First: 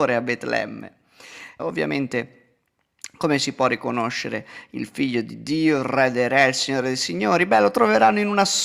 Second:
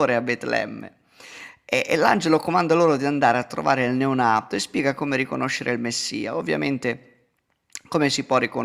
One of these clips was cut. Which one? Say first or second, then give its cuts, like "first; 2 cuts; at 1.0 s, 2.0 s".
first; 1 cut; at 1.6 s